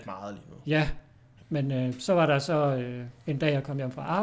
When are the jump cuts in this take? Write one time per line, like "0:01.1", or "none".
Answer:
0:01.4